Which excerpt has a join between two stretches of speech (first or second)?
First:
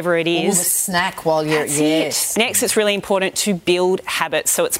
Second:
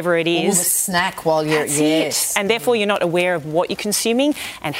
first